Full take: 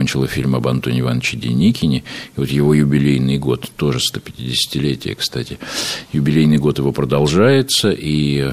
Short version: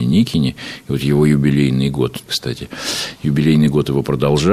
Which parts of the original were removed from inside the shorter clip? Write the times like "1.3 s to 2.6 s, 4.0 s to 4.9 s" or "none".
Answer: 3.7 s to 5.2 s